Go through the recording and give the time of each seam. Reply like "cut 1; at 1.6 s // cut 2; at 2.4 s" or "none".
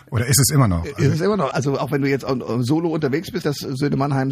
cut 1; at 1.5 s // cut 2; at 3.4 s